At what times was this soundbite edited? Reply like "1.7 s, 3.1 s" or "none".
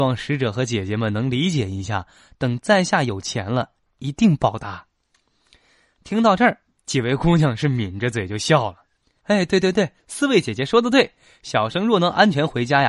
9.2 s